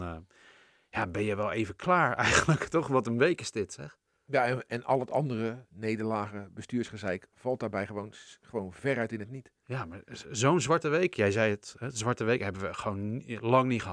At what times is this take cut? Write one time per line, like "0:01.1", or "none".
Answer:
0:05.7